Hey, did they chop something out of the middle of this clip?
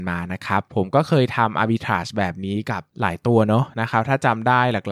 yes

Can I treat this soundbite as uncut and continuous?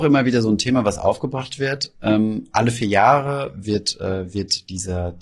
yes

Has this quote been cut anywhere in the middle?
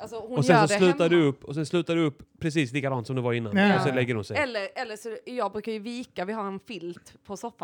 no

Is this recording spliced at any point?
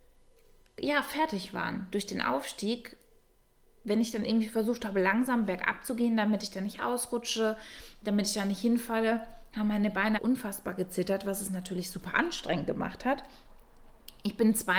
yes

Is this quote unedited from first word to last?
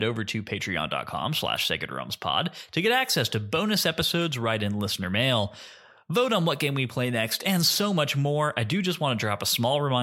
yes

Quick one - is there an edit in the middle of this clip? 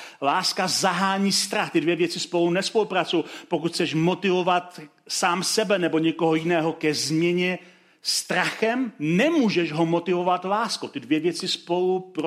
no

